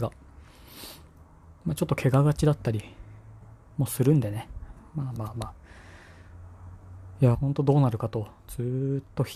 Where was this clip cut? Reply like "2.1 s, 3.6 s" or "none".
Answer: 7.3 s